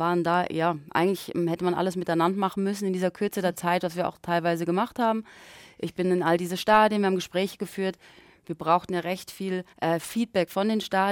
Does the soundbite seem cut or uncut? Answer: cut